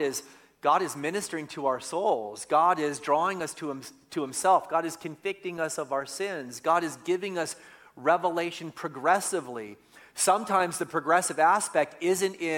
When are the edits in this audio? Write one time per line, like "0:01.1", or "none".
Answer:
none